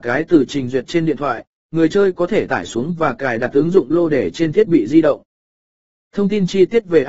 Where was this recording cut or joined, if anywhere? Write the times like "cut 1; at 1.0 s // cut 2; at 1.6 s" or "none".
none